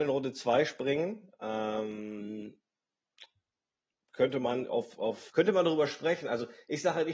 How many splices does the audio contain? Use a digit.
1